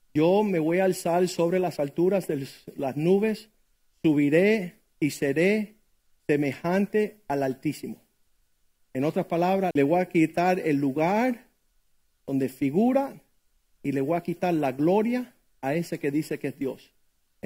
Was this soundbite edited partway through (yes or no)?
yes